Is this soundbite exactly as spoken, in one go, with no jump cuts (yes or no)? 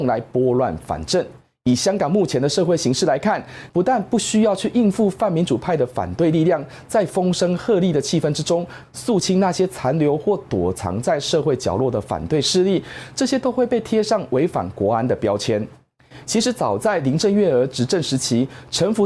no